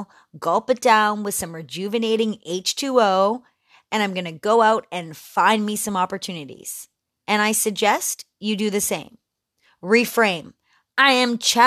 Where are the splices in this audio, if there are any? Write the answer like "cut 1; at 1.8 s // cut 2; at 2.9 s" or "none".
none